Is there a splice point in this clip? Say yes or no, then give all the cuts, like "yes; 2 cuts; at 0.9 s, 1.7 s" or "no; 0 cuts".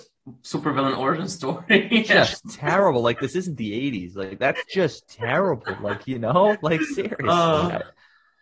no; 0 cuts